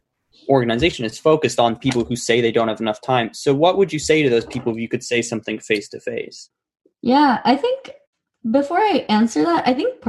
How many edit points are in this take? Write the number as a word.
zero